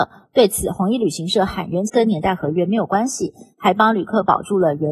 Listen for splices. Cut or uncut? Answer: cut